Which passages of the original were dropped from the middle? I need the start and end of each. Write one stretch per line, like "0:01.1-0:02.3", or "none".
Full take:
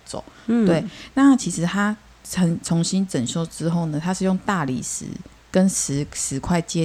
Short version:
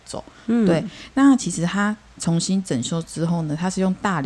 0:02.2-0:02.6